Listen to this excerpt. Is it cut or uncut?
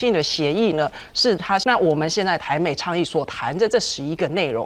cut